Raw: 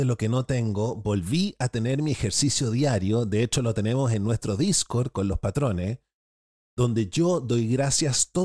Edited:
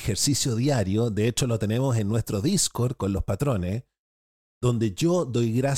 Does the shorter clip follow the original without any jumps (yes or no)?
yes